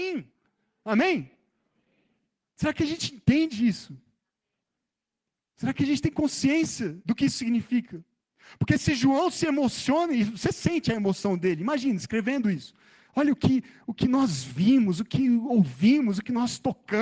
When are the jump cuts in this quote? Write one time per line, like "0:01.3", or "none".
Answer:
none